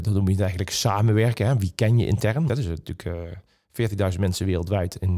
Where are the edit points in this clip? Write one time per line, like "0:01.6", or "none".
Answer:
0:02.5